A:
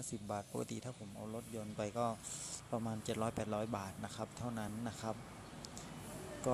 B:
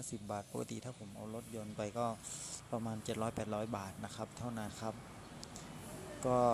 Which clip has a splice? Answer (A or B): B